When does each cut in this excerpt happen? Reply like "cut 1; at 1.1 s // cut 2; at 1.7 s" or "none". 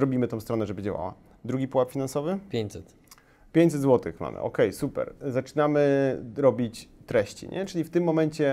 none